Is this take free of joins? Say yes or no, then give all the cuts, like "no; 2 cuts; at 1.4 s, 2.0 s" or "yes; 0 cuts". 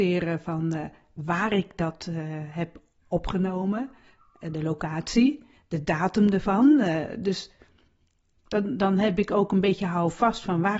yes; 0 cuts